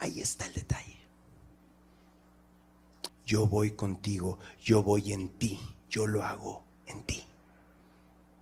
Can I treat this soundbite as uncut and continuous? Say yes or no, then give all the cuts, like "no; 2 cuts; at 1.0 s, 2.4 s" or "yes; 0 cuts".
no; 1 cut; at 3.1 s